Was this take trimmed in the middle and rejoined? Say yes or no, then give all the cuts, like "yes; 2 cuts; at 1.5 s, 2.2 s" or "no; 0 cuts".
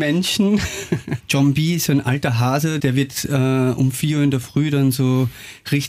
yes; 2 cuts; at 1.2 s, 2.8 s